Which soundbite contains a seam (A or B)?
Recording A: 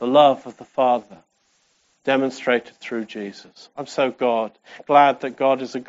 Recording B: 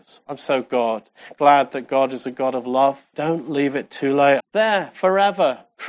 B